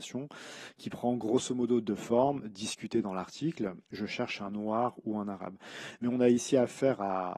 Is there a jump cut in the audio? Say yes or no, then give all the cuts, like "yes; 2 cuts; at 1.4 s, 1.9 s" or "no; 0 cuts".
yes; 1 cut; at 3.9 s